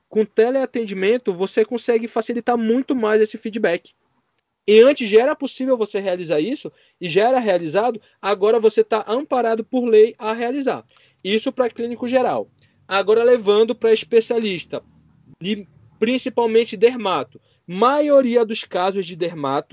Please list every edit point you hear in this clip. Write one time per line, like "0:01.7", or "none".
0:17.6